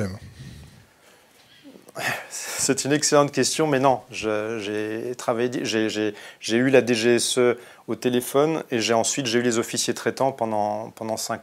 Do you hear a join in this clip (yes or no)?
no